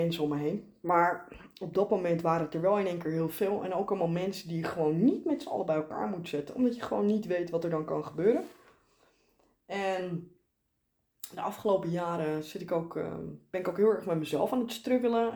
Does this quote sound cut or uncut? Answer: uncut